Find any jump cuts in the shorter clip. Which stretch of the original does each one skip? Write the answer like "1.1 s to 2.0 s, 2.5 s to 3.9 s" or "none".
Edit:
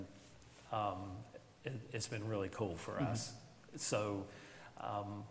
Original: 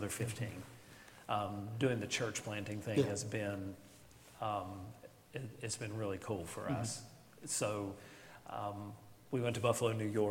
none